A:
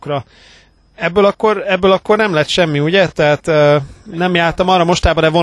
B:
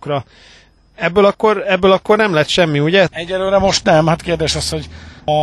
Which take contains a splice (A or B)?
B